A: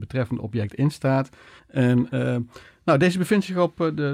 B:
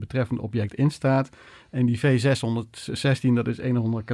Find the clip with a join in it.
A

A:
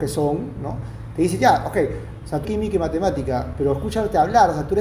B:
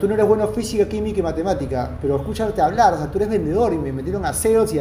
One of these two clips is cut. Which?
A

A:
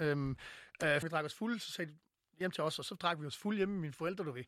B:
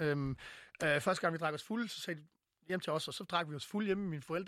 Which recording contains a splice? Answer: A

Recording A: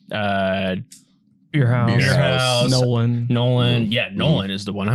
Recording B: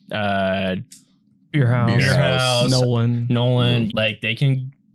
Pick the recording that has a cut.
B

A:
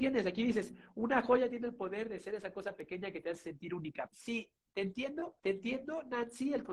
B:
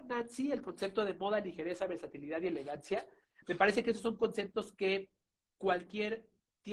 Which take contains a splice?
A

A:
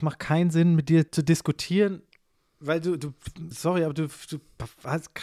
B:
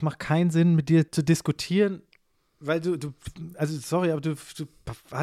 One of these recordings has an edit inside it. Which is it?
A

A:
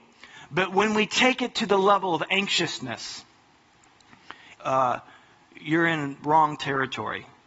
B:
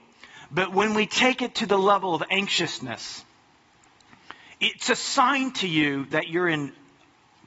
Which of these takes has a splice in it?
A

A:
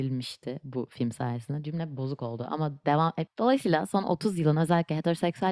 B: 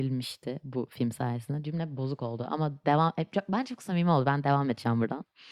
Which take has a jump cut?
A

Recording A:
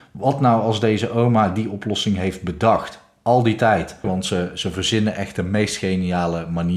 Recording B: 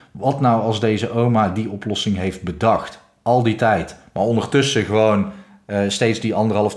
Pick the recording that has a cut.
A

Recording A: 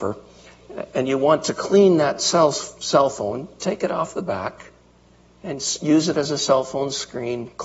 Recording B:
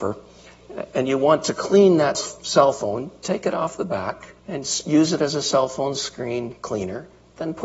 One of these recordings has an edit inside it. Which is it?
B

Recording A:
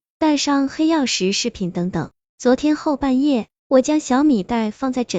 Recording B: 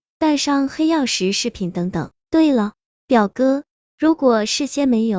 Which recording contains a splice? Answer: B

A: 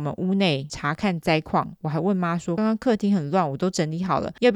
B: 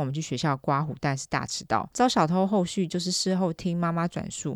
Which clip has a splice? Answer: A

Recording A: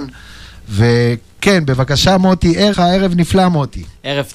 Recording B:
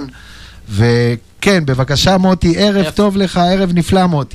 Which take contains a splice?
A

